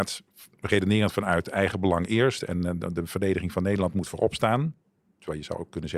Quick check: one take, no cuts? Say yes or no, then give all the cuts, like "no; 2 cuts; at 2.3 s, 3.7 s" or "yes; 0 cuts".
yes; 0 cuts